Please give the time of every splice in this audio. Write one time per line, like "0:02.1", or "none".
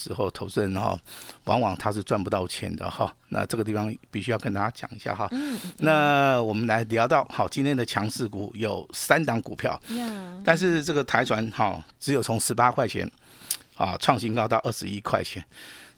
0:10.4